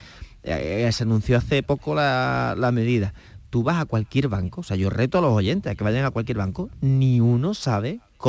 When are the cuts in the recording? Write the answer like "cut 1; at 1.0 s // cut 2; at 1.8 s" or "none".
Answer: none